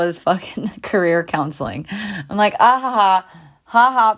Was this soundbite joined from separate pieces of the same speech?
no; 0 cuts

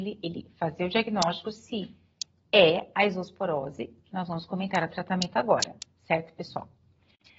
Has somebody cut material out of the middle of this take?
no; 0 cuts

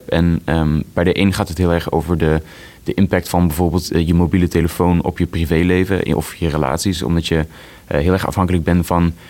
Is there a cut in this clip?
no; 0 cuts

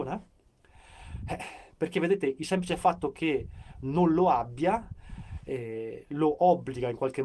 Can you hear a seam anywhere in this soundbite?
no; 0 cuts

